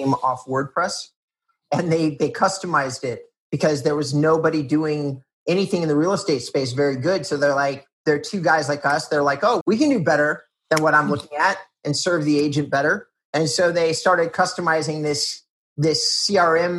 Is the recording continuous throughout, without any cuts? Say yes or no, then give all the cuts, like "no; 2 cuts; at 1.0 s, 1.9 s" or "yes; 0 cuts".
no; 1 cut; at 9.6 s